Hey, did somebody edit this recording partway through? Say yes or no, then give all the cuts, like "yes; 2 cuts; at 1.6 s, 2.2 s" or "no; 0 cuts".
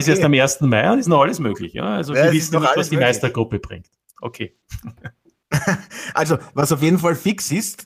no; 0 cuts